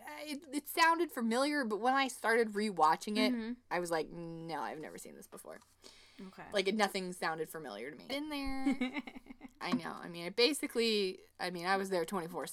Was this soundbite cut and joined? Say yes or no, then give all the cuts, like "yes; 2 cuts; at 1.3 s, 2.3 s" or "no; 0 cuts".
yes; 1 cut; at 8.1 s